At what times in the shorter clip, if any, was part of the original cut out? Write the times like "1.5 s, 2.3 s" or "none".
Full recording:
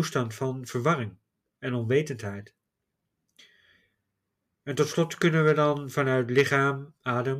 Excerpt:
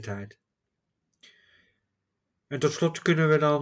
none